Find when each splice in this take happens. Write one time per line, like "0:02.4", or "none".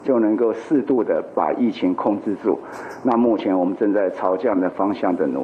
none